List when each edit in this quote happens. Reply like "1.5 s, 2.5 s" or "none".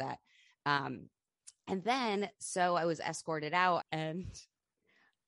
3.8 s